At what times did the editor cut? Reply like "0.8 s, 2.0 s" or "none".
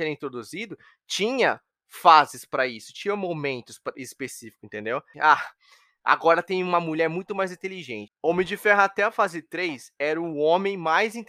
5.1 s, 8.1 s